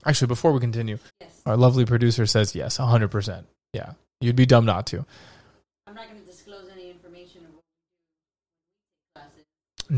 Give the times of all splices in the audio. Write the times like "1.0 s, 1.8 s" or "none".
1.1 s